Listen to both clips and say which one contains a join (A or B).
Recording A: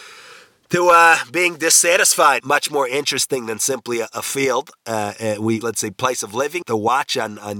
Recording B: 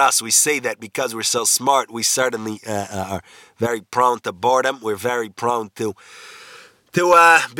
A